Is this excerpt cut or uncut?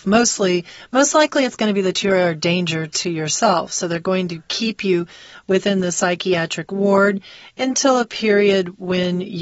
uncut